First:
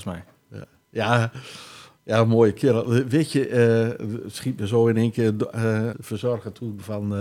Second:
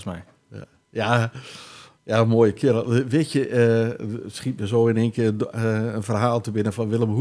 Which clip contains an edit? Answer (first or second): first